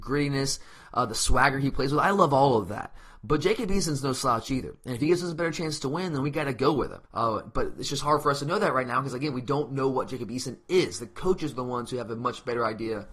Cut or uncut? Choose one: cut